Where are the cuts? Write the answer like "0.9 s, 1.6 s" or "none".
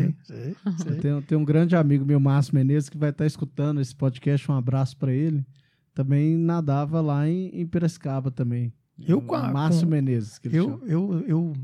none